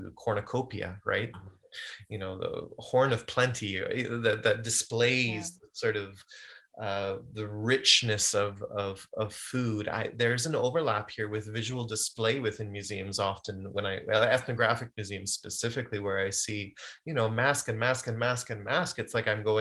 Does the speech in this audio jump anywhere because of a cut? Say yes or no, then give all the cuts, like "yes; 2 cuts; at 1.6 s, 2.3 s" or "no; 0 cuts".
yes; 1 cut; at 1.3 s